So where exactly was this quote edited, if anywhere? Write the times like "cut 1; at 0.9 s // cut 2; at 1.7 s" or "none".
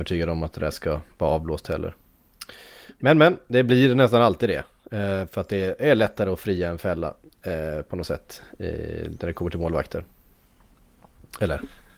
none

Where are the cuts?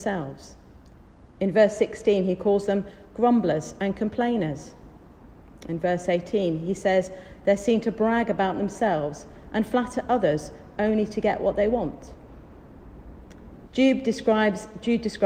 cut 1; at 13.7 s

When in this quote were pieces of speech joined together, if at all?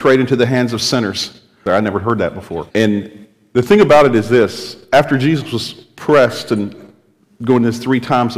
cut 1; at 1.7 s // cut 2; at 2.7 s

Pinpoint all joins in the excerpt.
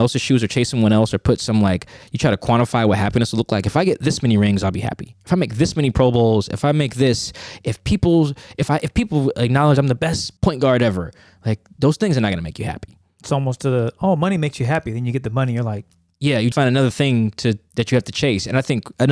cut 1; at 10.4 s // cut 2; at 16.5 s

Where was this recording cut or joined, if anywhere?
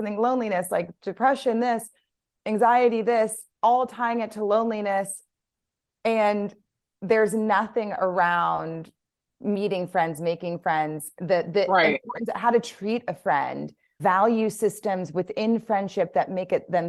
none

